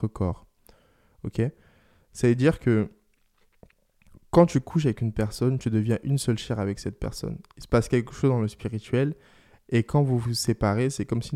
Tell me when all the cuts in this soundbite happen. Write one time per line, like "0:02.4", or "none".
none